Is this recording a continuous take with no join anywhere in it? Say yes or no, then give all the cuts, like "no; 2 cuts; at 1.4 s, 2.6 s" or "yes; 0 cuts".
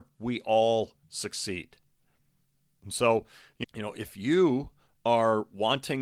no; 1 cut; at 3.6 s